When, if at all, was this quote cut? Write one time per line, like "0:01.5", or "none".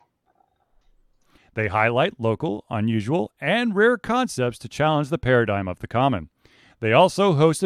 0:01.4